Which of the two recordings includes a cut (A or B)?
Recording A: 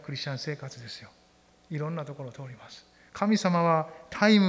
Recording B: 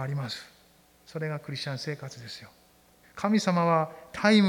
B